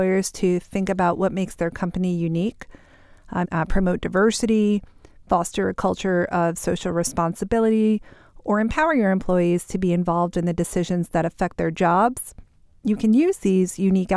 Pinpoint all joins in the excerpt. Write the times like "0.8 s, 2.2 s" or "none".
3.4 s

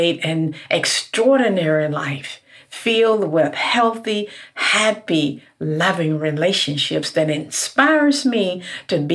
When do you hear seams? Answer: none

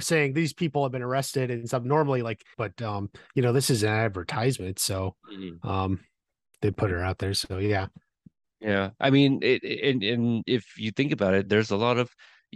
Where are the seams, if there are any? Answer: 2.5 s

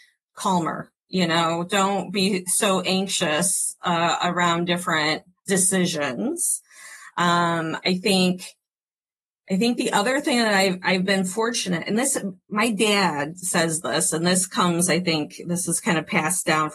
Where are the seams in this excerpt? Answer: none

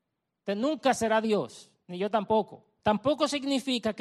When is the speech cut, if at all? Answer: 2.8 s

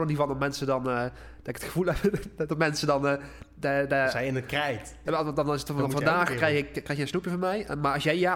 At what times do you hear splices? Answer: 5.1 s, 6.7 s

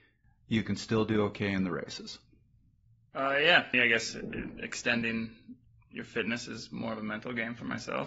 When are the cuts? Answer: 3.7 s

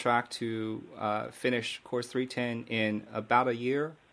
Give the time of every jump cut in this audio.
none

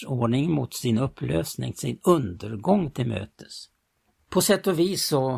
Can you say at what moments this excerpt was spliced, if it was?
4.2 s

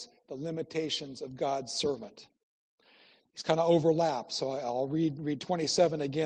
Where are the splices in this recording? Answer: none

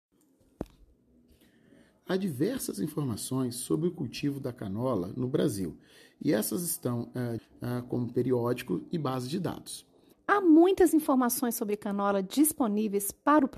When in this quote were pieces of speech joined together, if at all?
7.4 s, 10.1 s

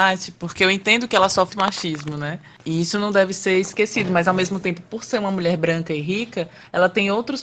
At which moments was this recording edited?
1.5 s

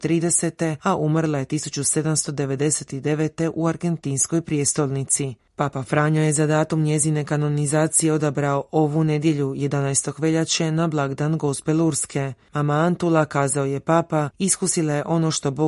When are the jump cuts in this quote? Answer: none

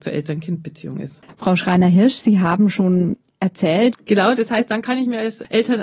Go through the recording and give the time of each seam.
3.9 s

